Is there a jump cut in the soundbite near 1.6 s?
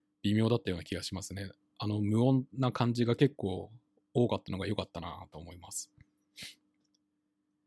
no; 0 cuts

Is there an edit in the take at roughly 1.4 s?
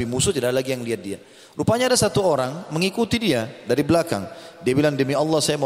no; 0 cuts

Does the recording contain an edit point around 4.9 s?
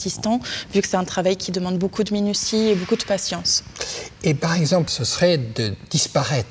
yes; 1 cut; at 4.9 s

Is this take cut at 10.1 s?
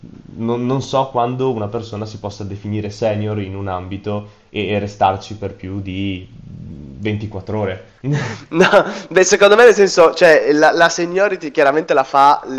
no; 1 cut; at 8.0 s

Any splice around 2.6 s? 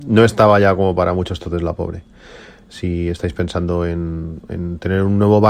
yes; 2 cuts; at 2.6 s, 4.4 s

